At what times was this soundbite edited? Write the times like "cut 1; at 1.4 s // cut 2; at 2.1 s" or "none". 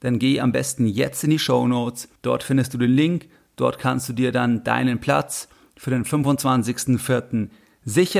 cut 1; at 2.2 s